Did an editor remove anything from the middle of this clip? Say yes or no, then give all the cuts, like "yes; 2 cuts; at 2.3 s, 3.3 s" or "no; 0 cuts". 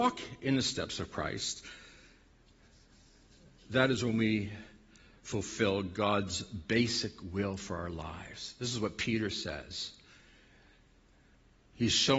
no; 0 cuts